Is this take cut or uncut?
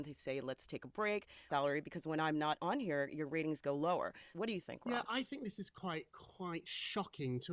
cut